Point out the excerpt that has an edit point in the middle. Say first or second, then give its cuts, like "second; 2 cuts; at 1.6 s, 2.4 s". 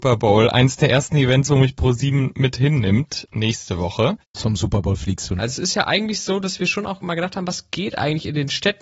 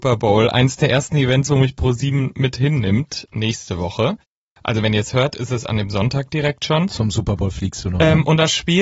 first; 2 cuts; at 4.3 s, 5.4 s